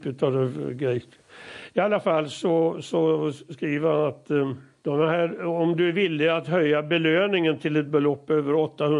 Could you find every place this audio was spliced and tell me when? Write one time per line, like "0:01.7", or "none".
none

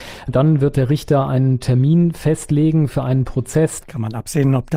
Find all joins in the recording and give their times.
0:03.8

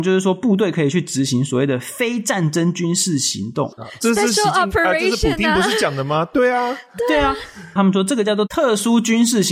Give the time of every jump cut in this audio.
0:03.7
0:07.8

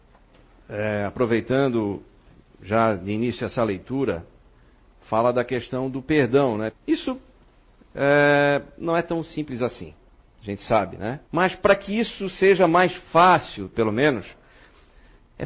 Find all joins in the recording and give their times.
0:06.7
0:11.2
0:13.7

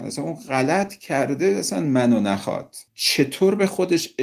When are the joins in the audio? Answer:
0:02.9

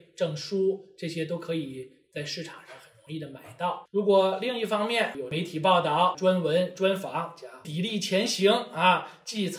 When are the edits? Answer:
0:03.9
0:07.6

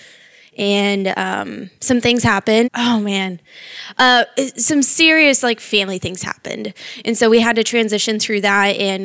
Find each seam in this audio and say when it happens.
0:02.6

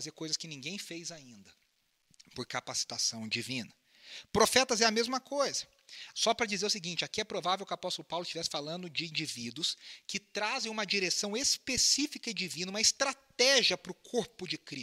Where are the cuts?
0:06.1

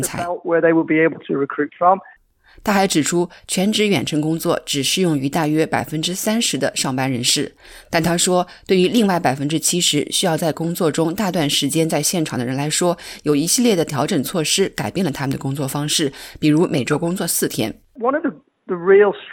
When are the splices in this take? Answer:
0:02.2

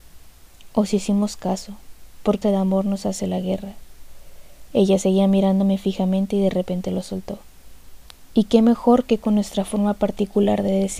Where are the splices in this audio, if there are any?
0:02.4
0:04.7
0:08.3

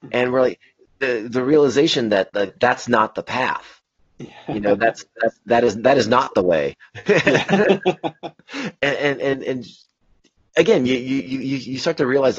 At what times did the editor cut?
0:08.3

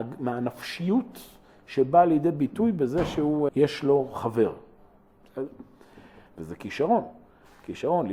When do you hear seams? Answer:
0:03.5
0:06.3

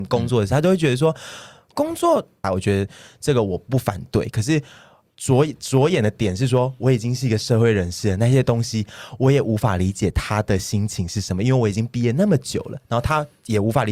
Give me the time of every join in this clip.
0:02.4

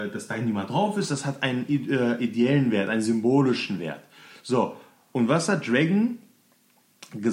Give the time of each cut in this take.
none

